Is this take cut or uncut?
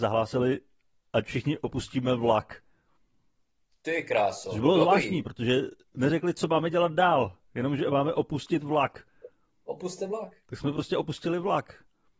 uncut